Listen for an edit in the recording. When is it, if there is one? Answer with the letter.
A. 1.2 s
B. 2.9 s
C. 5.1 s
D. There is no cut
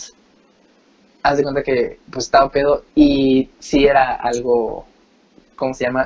B